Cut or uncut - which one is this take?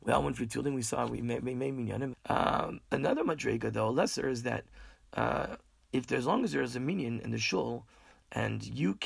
cut